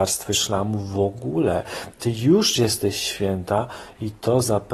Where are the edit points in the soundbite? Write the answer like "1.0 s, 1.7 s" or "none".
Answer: none